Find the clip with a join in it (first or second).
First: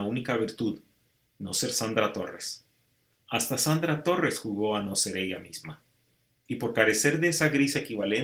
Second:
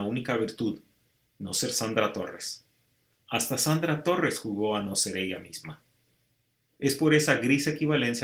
first